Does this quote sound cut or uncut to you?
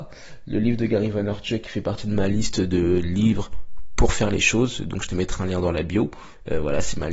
uncut